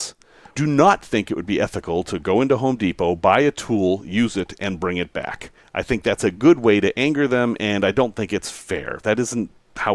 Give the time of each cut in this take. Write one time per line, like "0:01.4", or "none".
none